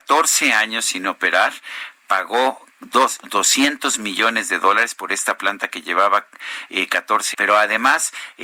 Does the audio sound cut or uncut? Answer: cut